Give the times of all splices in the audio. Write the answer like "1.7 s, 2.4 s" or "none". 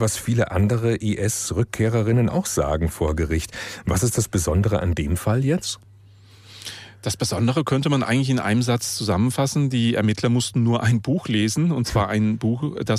none